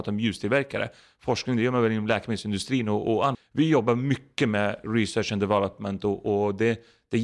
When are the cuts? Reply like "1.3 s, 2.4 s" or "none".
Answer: 3.3 s